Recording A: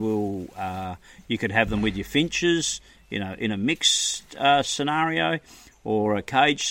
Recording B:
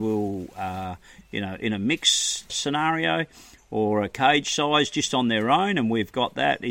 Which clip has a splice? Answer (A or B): B